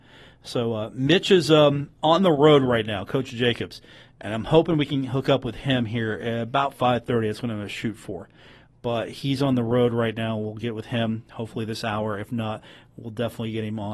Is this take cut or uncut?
uncut